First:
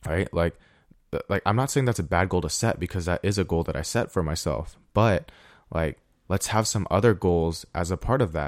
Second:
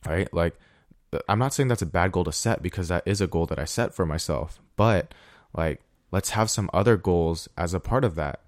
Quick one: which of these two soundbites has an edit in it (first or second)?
second